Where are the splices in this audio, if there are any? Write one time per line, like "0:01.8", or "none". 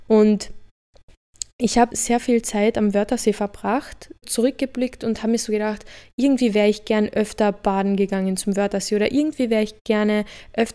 0:01.9
0:04.2